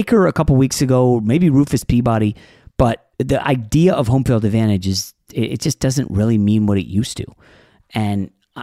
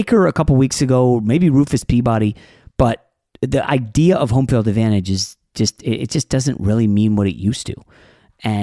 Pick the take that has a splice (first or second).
first